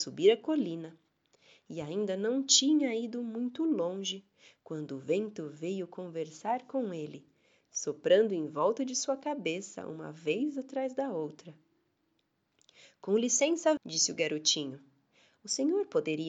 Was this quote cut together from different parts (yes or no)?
yes